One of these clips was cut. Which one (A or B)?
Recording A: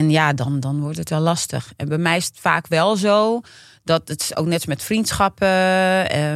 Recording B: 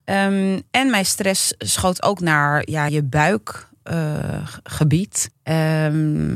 B